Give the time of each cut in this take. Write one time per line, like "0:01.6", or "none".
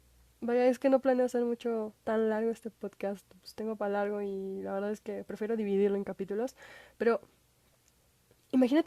0:03.4